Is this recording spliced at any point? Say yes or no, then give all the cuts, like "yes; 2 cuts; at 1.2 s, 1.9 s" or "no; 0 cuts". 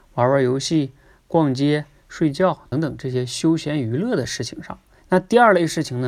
yes; 2 cuts; at 2.7 s, 5.0 s